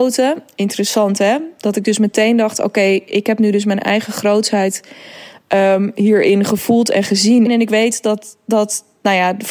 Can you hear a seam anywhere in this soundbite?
yes; 1 cut; at 7.5 s

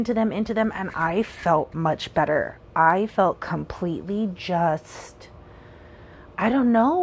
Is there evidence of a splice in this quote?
yes; 1 cut; at 1.7 s

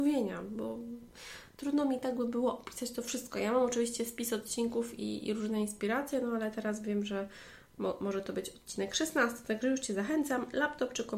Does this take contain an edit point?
no; 0 cuts

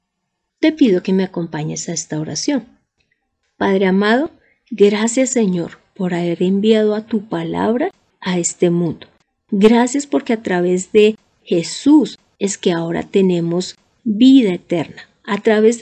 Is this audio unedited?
yes; 0 cuts

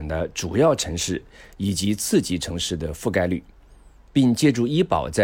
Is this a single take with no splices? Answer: yes; 0 cuts

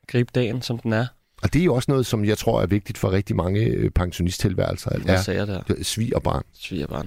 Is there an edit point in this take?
yes; 2 cuts; at 1.2 s, 5.0 s

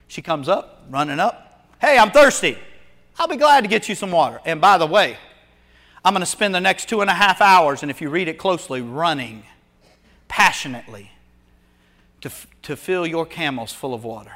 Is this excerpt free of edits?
yes; 0 cuts

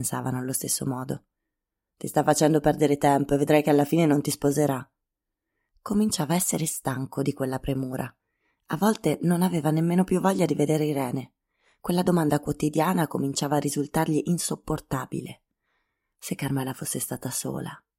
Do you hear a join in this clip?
no; 0 cuts

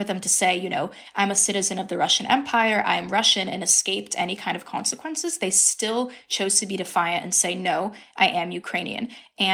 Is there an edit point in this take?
no; 0 cuts

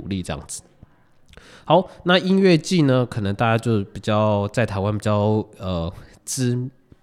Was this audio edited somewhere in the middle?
no; 0 cuts

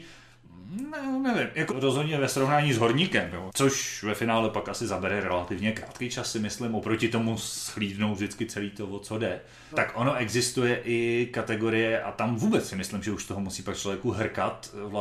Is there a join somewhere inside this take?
yes; 3 cuts; at 1.7 s, 3.5 s, 9.7 s

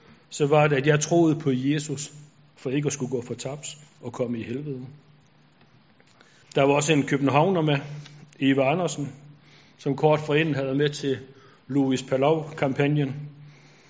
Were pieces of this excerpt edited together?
yes; 1 cut; at 6.4 s

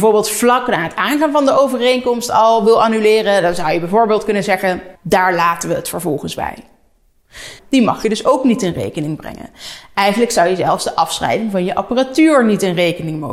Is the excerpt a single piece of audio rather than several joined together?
no; 2 cuts; at 5.0 s, 7.6 s

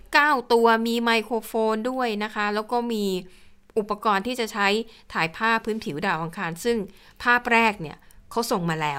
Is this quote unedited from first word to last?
yes; 0 cuts

